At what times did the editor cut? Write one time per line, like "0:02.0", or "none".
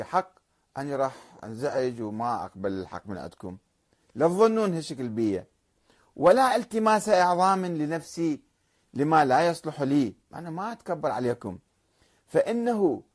0:10.2

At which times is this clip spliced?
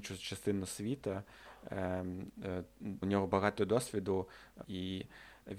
0:03.0
0:04.6

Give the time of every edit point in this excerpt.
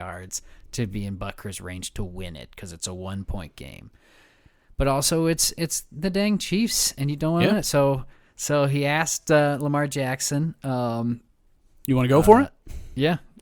none

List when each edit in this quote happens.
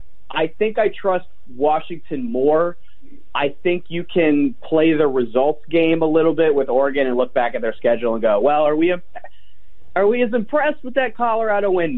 none

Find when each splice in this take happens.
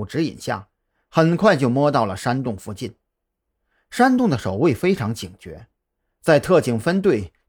none

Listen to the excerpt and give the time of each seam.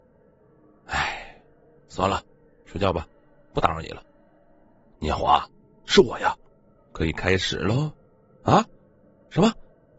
0:01.8
0:05.0
0:06.8

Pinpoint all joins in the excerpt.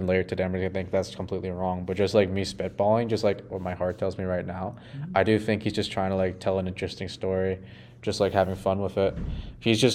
none

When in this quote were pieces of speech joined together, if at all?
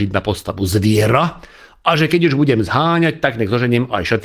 none

